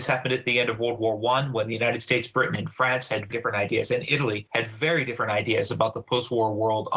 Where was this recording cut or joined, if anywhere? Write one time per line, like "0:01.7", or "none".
0:03.3